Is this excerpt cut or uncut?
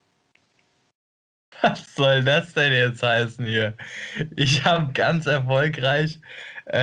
cut